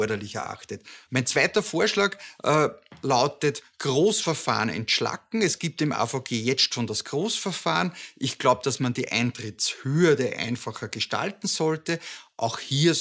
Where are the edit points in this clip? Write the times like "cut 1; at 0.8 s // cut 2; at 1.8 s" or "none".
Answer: cut 1; at 1.1 s